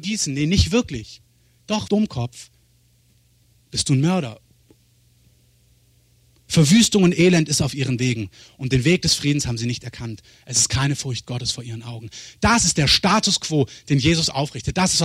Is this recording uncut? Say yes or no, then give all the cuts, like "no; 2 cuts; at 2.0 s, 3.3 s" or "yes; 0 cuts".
no; 1 cut; at 1.9 s